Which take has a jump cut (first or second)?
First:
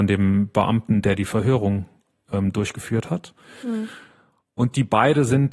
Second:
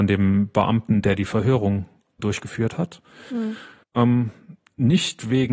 second